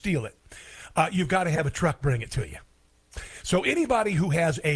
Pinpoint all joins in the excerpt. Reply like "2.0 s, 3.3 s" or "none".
none